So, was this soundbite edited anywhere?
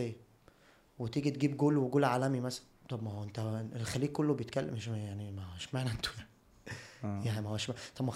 no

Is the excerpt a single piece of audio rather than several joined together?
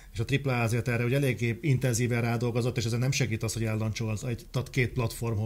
yes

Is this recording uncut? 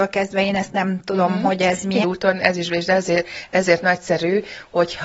no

